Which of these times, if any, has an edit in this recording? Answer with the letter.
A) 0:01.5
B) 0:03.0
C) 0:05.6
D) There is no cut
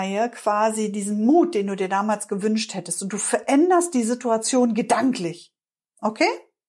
D